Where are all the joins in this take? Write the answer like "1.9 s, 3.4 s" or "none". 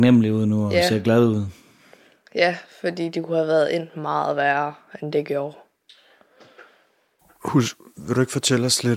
none